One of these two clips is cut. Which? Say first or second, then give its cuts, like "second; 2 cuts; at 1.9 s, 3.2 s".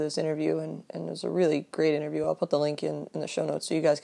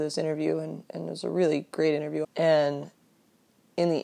second; 1 cut; at 2.2 s